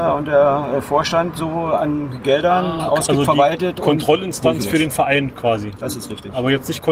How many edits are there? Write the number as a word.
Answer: zero